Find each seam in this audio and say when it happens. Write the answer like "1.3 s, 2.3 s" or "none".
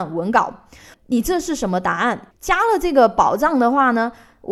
0.9 s, 2.3 s